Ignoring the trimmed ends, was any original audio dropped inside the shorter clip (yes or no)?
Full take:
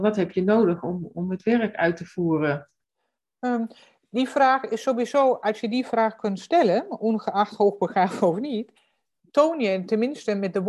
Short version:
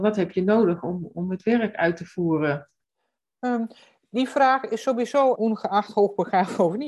yes